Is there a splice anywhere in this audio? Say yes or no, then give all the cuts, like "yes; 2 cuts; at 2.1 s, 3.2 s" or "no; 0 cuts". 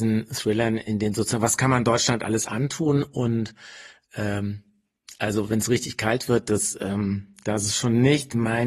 no; 0 cuts